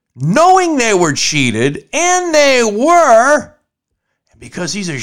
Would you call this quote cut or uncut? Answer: uncut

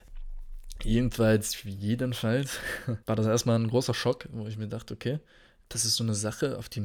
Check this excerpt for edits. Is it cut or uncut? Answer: cut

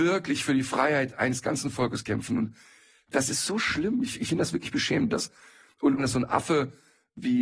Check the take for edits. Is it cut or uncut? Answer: cut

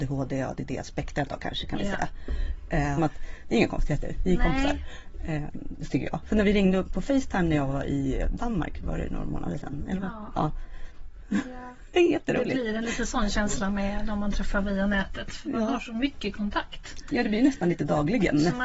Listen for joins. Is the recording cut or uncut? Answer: cut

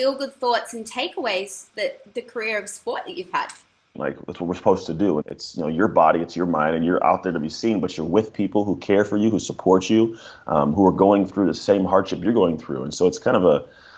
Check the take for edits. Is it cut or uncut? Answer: cut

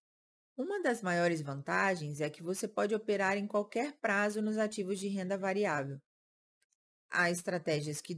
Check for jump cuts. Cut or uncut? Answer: uncut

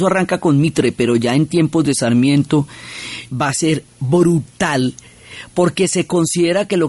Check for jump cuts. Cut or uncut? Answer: cut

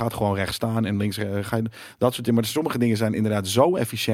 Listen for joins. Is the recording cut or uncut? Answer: uncut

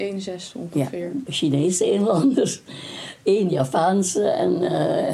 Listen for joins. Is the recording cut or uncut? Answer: cut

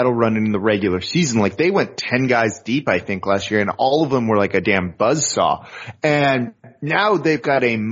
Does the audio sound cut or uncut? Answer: uncut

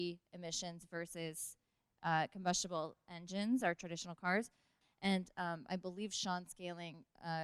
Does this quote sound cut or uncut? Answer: cut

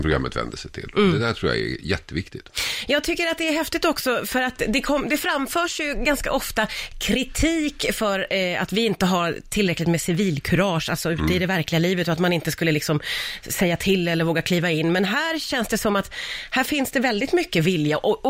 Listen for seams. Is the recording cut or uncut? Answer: uncut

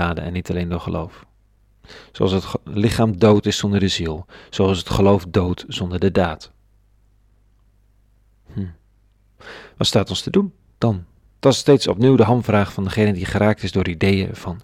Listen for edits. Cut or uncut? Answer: uncut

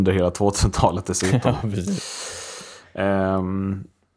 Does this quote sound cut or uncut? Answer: uncut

